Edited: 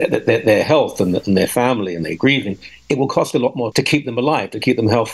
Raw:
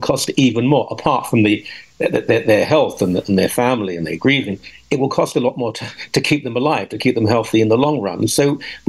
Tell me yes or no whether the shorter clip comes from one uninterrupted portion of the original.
no